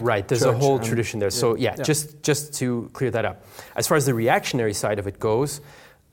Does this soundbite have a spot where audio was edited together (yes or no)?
no